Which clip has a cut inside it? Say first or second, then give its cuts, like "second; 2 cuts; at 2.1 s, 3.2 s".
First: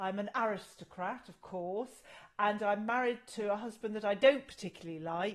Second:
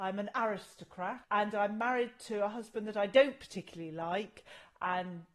second; 1 cut; at 1.2 s